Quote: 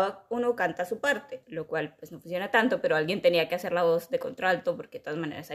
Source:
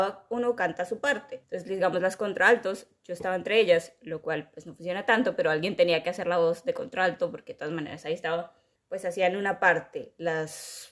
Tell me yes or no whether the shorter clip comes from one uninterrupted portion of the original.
no